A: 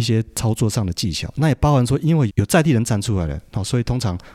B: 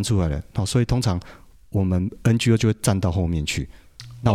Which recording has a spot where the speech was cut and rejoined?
A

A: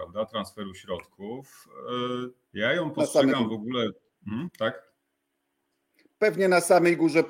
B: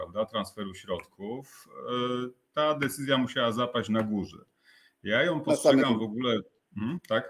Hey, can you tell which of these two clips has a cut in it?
A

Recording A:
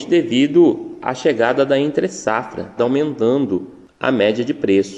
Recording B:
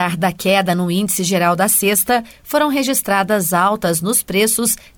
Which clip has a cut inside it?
A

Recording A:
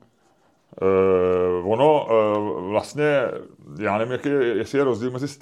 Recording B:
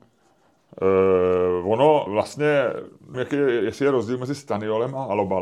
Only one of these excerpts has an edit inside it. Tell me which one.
B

